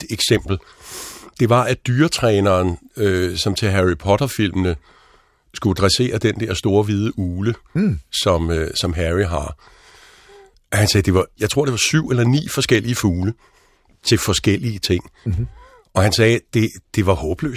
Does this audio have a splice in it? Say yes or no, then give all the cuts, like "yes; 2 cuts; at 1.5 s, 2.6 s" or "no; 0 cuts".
yes; 1 cut; at 11.4 s